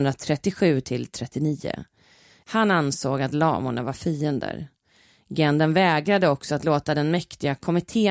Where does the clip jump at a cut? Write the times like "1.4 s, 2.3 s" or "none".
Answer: 2.4 s